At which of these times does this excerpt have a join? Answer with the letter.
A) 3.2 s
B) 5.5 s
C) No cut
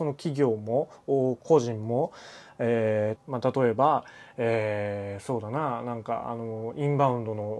A